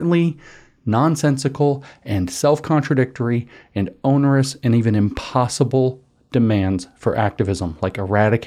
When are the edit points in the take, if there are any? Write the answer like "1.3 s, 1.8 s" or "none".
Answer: none